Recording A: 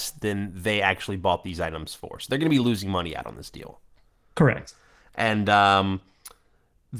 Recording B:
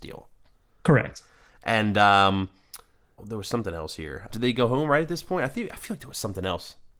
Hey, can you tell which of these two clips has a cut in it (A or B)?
B